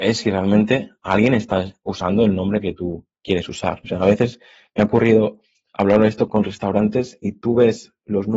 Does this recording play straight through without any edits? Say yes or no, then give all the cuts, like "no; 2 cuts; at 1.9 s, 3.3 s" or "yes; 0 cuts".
no; 2 cuts; at 3.8 s, 6.3 s